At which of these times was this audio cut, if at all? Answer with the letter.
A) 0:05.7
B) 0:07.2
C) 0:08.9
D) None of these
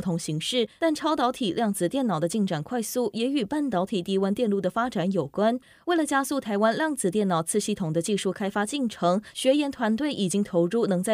D